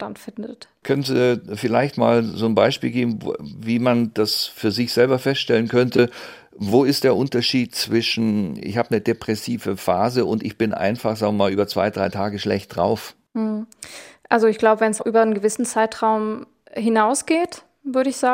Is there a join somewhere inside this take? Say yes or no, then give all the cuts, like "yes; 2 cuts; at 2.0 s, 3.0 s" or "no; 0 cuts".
yes; 1 cut; at 15.0 s